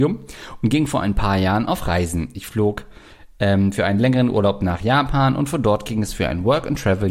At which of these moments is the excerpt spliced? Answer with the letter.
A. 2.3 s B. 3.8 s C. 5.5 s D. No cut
D